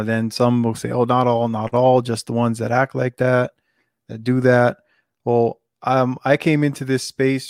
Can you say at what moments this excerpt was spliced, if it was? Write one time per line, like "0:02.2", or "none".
none